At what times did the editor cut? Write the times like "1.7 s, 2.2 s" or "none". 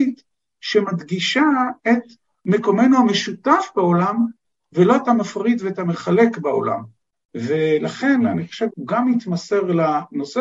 8.7 s